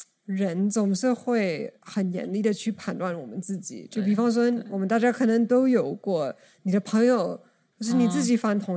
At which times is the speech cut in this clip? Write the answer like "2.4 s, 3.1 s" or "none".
7.7 s